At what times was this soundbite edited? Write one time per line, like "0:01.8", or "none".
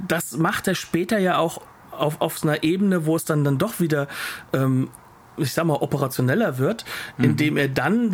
none